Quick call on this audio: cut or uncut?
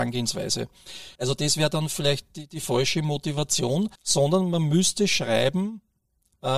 cut